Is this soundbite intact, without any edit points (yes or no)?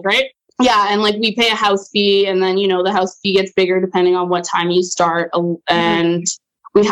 yes